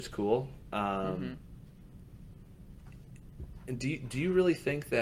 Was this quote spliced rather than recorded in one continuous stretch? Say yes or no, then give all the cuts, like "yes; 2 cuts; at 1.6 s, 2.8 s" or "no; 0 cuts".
no; 0 cuts